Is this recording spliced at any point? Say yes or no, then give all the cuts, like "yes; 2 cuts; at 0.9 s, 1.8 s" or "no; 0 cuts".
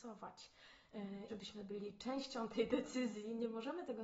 yes; 1 cut; at 1.3 s